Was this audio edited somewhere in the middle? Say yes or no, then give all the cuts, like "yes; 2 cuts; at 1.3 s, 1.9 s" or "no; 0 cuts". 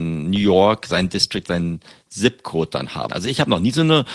yes; 1 cut; at 3.1 s